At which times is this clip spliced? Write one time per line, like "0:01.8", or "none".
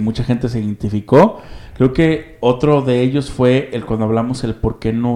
none